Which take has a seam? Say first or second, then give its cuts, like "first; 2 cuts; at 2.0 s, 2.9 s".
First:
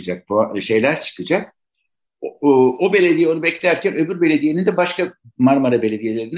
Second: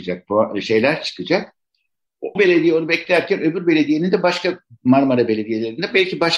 second; 1 cut; at 2.4 s